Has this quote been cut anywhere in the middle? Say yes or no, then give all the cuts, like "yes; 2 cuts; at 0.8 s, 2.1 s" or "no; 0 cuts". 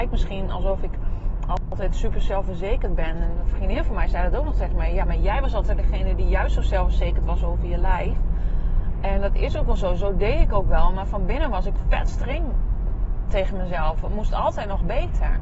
yes; 1 cut; at 13.3 s